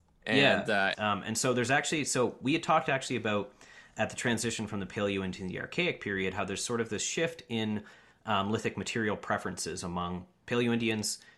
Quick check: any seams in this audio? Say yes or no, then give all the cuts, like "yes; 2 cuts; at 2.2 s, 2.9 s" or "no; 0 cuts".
yes; 1 cut; at 0.9 s